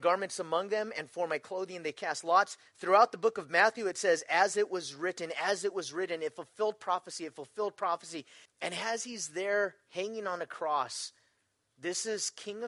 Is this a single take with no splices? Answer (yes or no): no